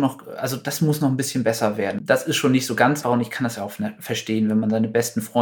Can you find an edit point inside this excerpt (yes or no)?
yes